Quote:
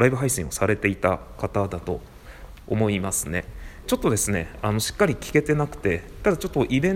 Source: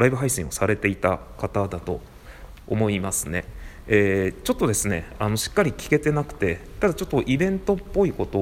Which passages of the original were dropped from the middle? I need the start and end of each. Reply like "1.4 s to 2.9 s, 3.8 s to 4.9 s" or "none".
3.8 s to 4.4 s